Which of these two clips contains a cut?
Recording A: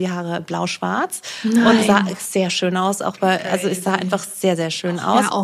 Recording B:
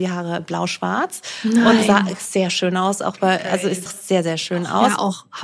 B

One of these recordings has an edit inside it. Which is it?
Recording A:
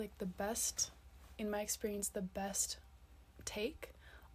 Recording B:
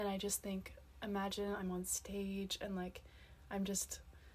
A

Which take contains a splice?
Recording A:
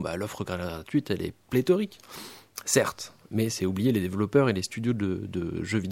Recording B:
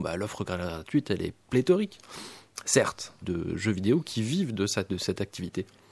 B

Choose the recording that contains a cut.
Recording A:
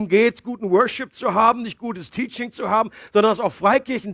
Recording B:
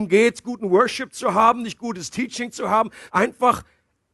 B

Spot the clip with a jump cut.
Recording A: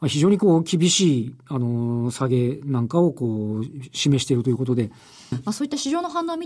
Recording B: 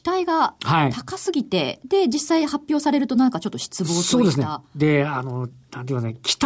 A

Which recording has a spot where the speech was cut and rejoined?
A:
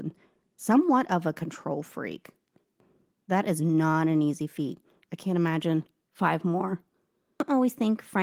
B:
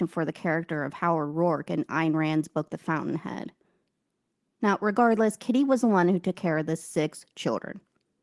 A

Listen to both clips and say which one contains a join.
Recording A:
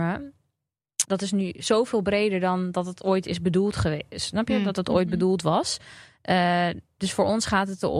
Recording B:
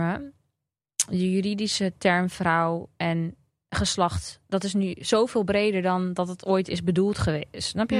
A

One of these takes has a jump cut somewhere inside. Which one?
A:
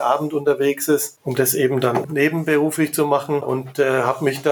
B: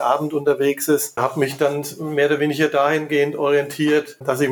B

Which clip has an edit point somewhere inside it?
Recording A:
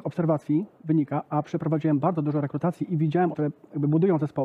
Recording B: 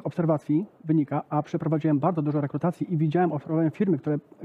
A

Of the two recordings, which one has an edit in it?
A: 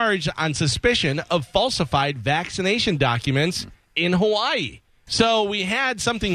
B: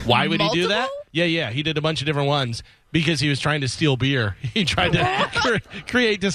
A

